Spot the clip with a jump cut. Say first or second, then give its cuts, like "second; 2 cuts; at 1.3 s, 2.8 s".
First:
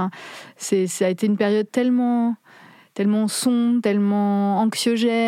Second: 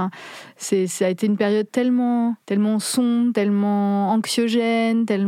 second; 1 cut; at 2.4 s